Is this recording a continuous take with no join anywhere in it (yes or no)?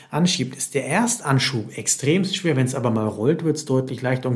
yes